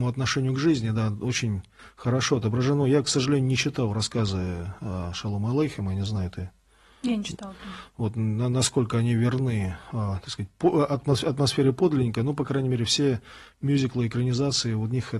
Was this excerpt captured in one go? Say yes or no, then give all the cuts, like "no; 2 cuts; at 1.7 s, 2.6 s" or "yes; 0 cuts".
yes; 0 cuts